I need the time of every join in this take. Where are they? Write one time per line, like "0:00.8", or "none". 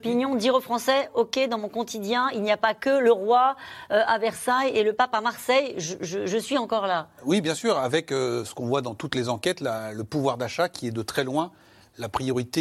none

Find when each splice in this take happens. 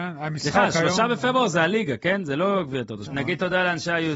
0:03.1

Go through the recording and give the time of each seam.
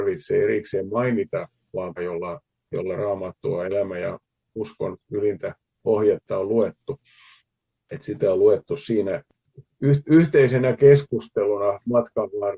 0:02.0

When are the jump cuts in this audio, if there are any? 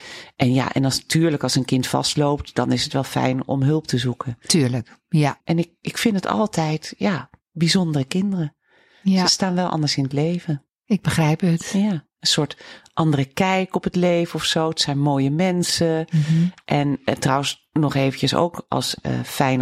0:05.4
0:10.7

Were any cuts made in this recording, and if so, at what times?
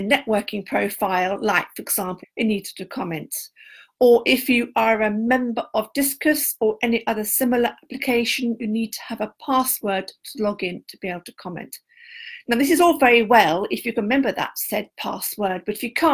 0:02.2

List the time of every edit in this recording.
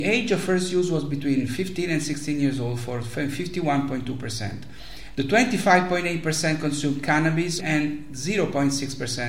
0:05.1
0:07.6

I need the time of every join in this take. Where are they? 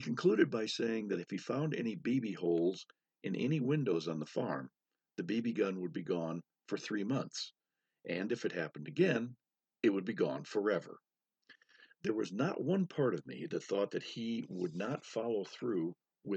none

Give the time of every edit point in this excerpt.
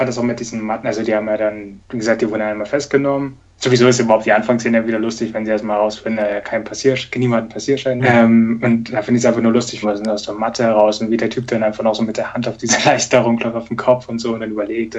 0:08.0
0:09.8

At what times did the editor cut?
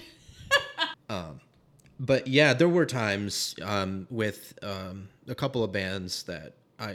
0:00.9

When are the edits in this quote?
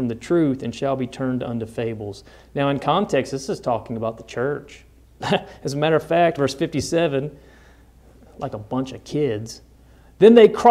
0:05.2
0:06.4

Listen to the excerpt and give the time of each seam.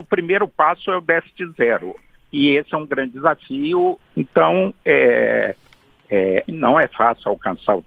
0:04.0
0:06.5

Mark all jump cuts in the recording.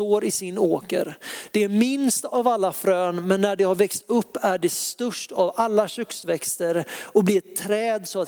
none

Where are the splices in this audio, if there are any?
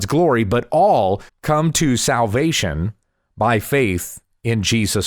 0:01.3

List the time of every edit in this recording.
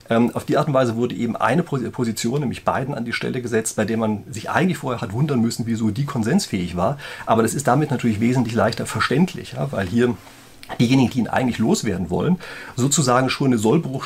none

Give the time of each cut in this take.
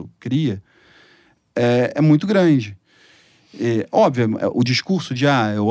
none

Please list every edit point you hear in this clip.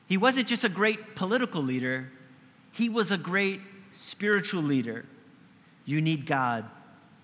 0:05.8

